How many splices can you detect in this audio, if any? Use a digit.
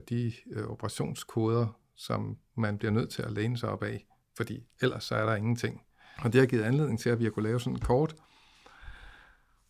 1